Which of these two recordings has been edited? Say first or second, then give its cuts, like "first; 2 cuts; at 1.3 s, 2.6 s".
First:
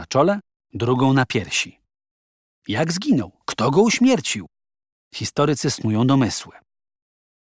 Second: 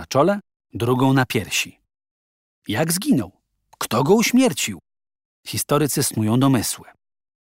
first; 1 cut; at 3.4 s